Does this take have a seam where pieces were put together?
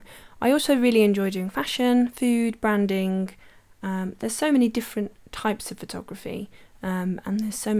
no; 0 cuts

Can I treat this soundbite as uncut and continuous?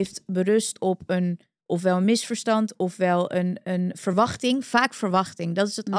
yes; 0 cuts

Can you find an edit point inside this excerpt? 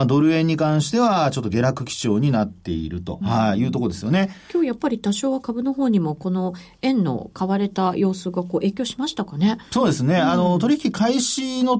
yes; 1 cut; at 3.2 s

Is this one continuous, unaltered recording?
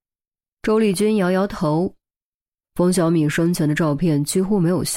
no; 1 cut; at 2.6 s

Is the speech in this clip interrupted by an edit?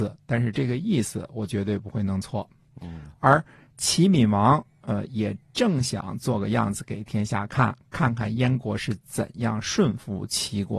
no; 0 cuts

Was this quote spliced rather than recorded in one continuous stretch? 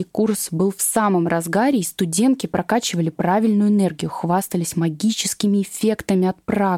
no; 0 cuts

